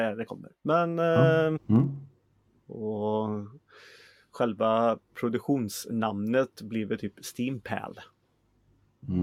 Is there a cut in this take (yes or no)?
yes